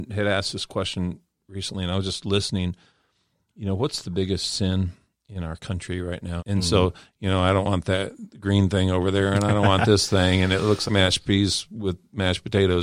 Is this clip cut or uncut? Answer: cut